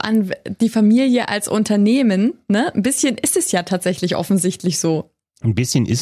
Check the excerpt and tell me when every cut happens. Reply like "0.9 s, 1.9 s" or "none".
none